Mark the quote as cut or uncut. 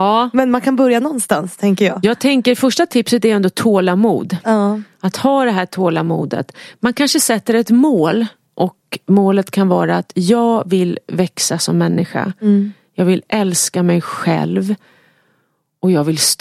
uncut